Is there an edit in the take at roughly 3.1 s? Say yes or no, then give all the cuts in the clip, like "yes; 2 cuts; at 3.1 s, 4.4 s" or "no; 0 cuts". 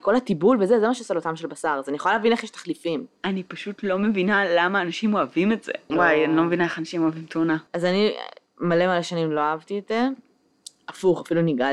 no; 2 cuts; at 5.9 s, 7.7 s